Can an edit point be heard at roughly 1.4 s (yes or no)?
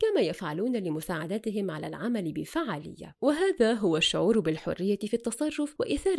no